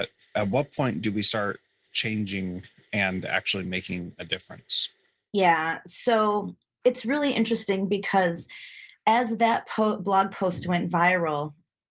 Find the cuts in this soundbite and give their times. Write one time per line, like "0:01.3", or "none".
none